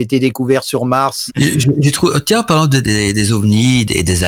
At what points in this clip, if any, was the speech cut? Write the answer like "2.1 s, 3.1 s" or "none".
1.3 s, 2.8 s